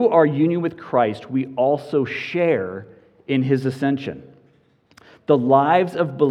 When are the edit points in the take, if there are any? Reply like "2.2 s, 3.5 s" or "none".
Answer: none